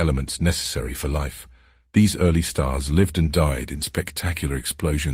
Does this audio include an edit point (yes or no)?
no